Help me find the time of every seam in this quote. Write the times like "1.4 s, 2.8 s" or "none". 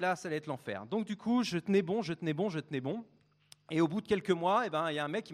none